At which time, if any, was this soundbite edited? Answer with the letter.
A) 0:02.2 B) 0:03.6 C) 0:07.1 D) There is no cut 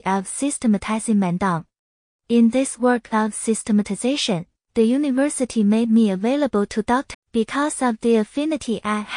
C